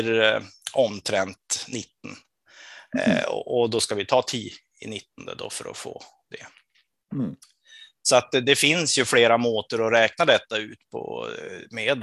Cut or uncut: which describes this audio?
uncut